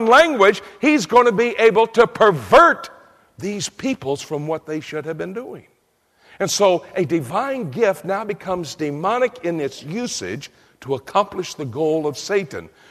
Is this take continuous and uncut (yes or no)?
yes